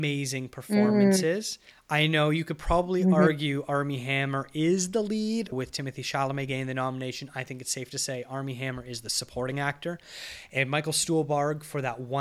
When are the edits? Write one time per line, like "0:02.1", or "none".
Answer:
0:05.5